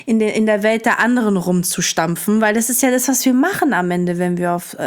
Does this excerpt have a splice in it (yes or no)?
no